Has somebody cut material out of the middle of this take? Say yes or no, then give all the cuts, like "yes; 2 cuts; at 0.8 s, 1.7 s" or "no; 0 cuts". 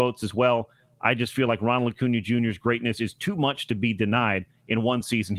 no; 0 cuts